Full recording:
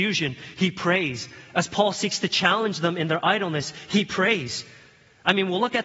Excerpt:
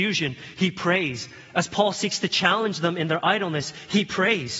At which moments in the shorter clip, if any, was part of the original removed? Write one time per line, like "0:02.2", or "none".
none